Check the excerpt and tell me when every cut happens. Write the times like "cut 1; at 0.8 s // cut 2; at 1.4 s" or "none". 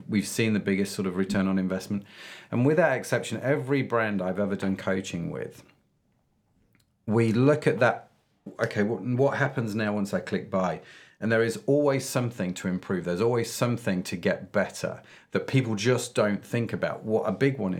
none